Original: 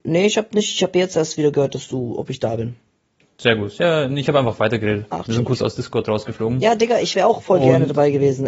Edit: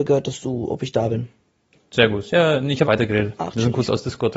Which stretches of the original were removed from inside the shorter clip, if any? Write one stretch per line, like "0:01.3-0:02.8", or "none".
0:04.3-0:04.6